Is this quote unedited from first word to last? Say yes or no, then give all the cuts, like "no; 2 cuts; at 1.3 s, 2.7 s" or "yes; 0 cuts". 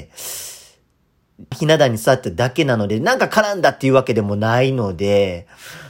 no; 1 cut; at 1.5 s